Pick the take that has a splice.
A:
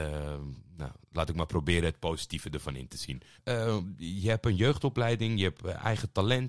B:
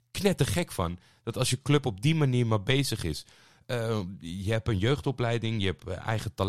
A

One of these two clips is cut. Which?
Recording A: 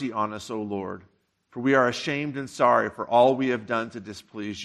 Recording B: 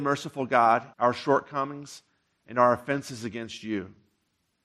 B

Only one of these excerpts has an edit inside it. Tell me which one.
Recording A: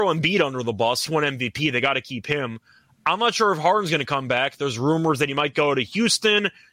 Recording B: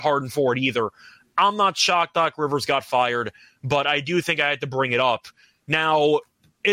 A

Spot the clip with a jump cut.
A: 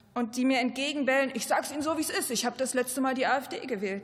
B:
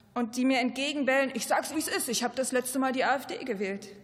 B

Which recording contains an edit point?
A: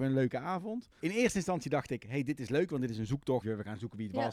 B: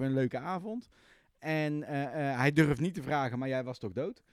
A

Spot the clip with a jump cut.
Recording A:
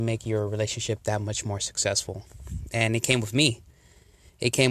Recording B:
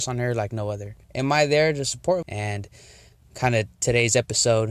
B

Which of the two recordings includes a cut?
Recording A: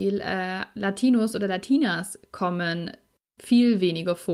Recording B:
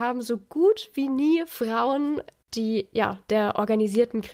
B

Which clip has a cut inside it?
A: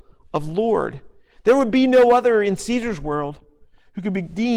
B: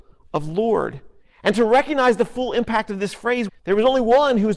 B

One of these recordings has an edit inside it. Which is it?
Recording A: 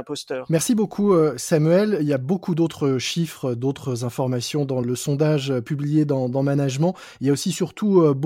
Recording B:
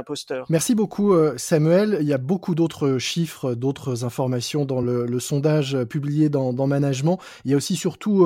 A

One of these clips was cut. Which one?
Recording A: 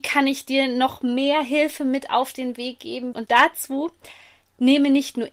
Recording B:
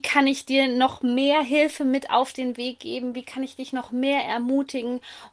A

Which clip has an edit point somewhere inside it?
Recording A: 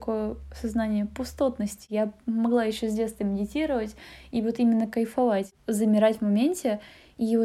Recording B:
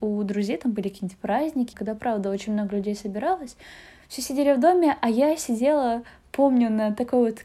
B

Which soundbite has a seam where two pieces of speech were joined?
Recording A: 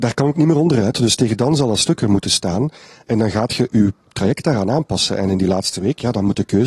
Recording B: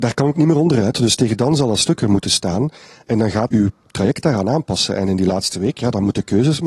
B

